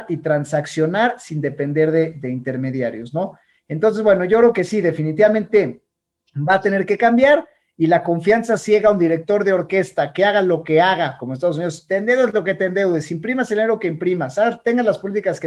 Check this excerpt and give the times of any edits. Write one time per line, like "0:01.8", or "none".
none